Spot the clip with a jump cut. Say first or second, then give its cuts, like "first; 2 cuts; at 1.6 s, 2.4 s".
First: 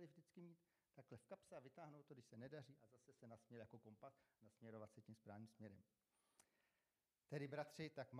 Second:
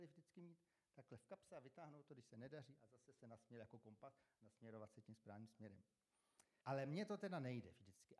second; 1 cut; at 6.6 s